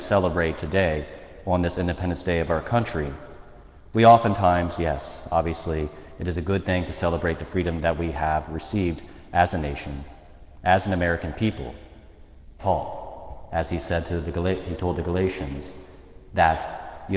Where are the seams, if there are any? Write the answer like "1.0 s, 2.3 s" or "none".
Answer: 12.6 s